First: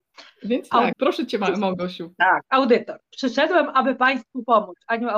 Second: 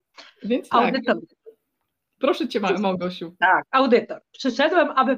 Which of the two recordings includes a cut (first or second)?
first